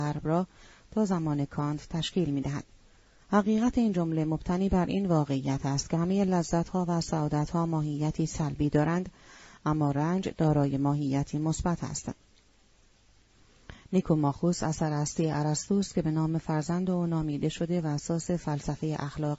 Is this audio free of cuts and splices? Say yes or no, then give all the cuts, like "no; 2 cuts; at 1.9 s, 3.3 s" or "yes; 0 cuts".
no; 1 cut; at 3.2 s